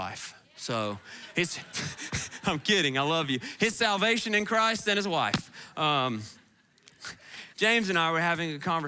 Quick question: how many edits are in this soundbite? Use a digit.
2